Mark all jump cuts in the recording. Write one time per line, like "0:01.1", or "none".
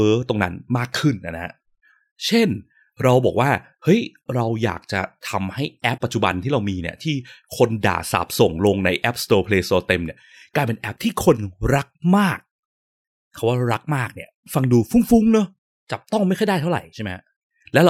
0:06.0